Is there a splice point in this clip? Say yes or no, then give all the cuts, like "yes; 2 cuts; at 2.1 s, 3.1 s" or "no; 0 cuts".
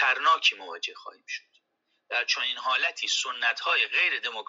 no; 0 cuts